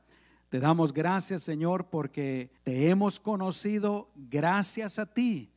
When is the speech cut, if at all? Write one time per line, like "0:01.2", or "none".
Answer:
0:02.6